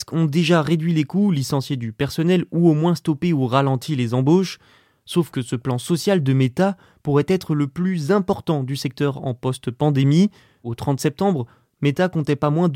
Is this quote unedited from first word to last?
yes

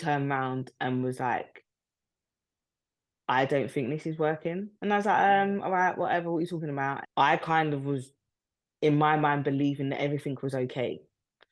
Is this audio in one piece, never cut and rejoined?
no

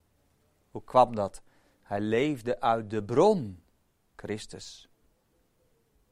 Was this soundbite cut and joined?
no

